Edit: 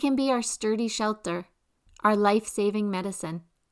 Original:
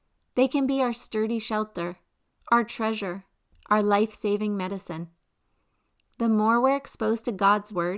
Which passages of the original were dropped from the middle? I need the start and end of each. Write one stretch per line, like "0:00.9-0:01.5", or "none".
0:02.4-0:03.5